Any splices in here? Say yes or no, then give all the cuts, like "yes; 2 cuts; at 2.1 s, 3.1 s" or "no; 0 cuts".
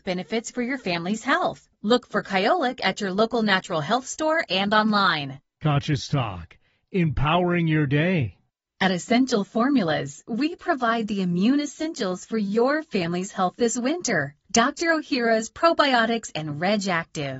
no; 0 cuts